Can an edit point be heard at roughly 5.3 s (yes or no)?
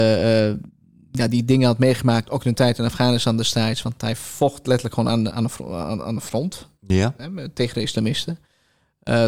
yes